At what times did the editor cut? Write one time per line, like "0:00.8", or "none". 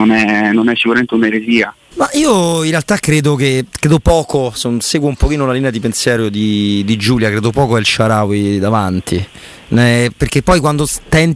0:01.9